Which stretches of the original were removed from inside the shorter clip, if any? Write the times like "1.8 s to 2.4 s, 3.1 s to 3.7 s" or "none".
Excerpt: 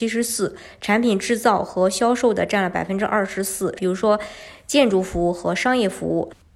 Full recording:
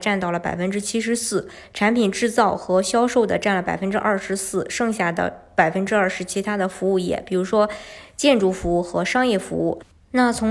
4.7 s to 7.2 s